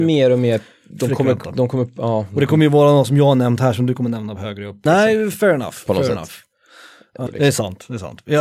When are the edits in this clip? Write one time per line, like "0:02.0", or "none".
0:04.9
0:07.3